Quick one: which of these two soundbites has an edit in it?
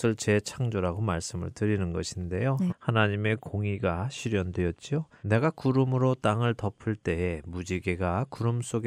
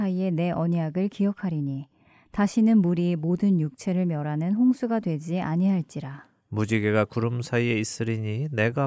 first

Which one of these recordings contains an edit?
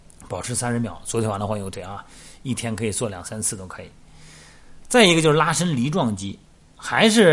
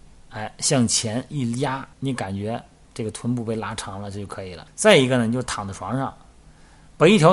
second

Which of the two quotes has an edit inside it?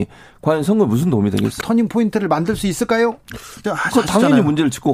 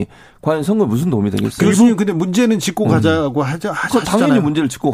first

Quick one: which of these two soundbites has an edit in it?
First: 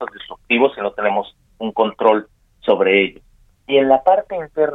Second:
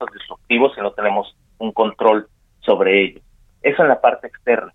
first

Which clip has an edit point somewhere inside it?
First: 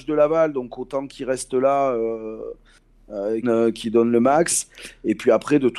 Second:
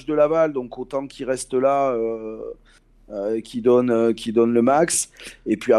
first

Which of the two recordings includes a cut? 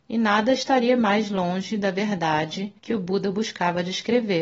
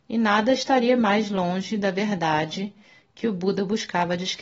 first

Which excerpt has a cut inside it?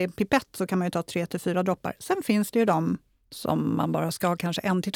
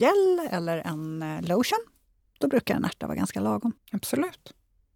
second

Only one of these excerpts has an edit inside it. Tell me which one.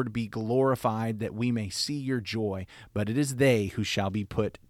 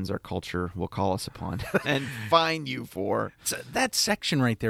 second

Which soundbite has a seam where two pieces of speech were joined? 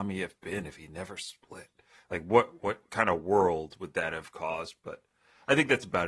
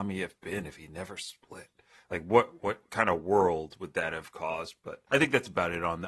second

